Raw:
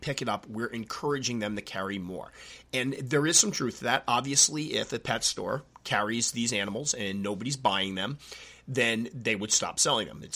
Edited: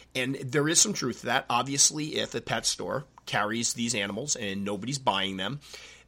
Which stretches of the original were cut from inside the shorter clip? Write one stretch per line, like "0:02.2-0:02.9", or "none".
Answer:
none